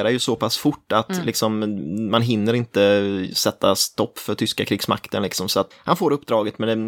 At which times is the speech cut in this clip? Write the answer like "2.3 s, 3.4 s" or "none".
5.7 s